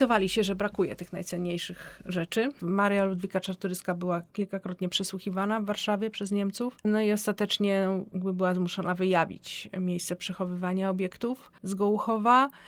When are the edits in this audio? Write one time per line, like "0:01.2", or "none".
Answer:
none